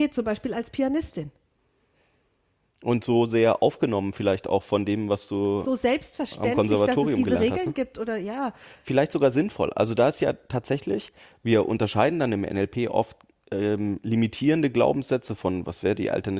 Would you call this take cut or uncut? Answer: uncut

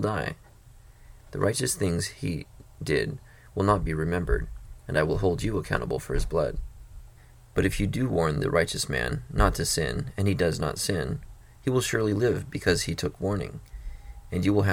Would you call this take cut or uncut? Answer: cut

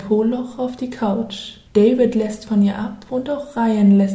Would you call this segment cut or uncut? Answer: cut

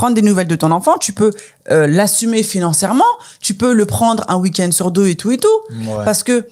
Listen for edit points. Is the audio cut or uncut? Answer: uncut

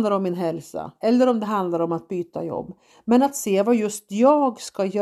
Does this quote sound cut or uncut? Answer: uncut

